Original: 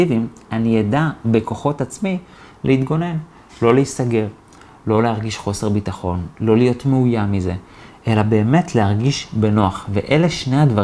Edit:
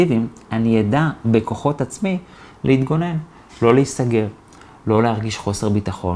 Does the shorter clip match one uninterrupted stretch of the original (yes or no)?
yes